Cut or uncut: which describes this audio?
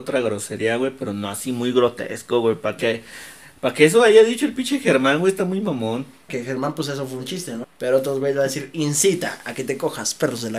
cut